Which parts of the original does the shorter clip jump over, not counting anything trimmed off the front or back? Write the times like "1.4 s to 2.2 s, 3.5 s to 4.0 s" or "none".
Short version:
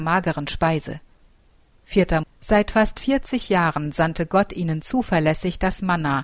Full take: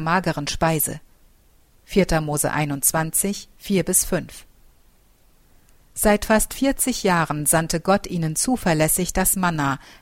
2.2 s to 5.8 s